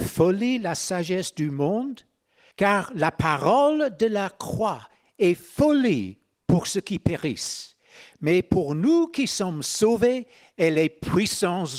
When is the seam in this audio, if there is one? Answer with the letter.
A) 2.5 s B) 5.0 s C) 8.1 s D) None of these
A